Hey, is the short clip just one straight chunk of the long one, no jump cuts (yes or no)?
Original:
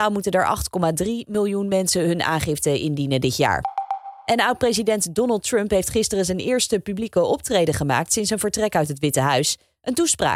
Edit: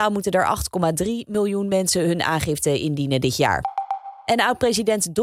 yes